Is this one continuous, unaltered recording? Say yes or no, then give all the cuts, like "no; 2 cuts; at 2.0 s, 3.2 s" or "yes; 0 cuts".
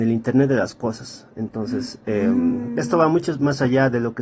yes; 0 cuts